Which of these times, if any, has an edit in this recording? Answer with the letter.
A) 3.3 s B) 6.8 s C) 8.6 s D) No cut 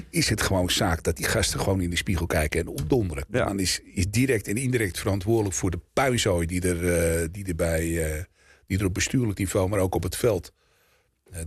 A